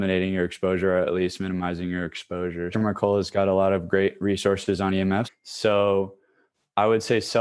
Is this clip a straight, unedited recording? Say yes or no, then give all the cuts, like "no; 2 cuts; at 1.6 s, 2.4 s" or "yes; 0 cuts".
no; 2 cuts; at 2.7 s, 5.2 s